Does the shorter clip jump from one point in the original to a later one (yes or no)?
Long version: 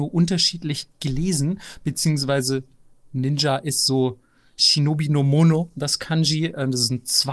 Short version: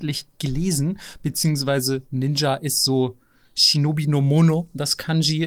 yes